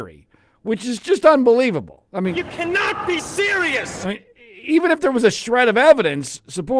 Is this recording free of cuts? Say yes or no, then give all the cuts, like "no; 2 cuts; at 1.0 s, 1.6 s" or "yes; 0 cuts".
yes; 0 cuts